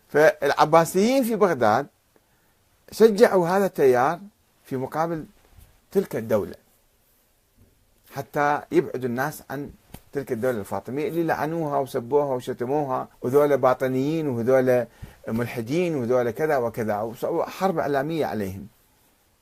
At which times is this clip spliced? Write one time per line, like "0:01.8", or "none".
0:13.1